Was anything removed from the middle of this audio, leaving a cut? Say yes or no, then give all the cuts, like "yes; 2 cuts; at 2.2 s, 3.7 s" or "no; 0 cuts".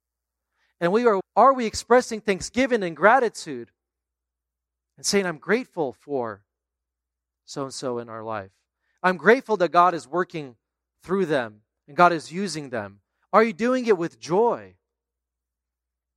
yes; 1 cut; at 1.2 s